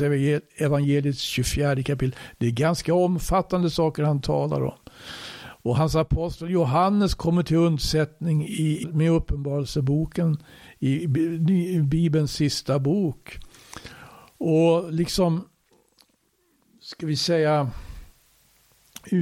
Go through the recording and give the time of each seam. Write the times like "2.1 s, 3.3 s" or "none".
8.8 s